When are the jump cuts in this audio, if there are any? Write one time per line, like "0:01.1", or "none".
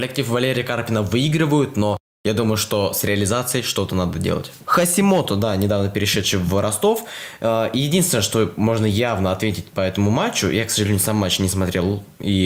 0:04.6

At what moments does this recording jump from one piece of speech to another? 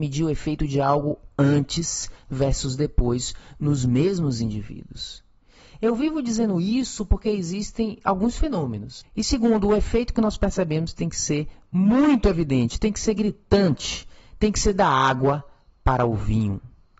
0:09.0

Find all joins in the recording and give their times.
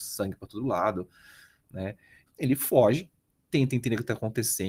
0:02.3

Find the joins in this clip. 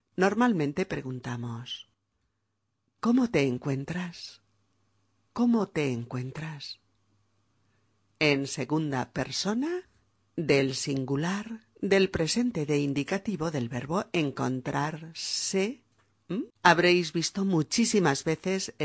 0:16.5

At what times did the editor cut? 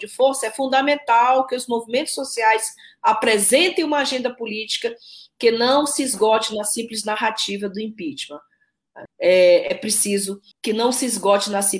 0:09.1
0:10.5

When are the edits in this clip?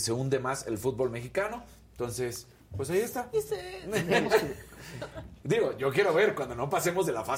0:03.3

